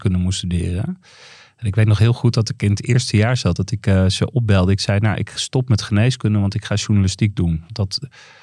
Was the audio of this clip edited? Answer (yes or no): no